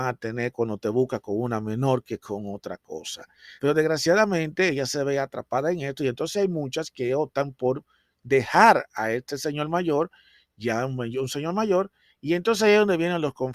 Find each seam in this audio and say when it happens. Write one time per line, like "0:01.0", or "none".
0:03.6